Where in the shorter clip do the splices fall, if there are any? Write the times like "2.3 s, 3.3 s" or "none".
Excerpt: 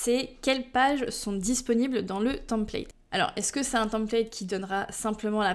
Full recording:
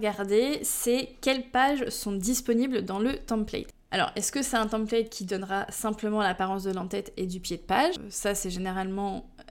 none